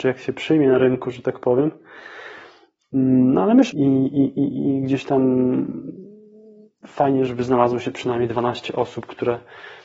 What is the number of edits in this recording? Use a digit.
2